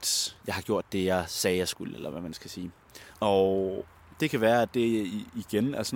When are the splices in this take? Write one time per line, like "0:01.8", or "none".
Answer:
0:03.1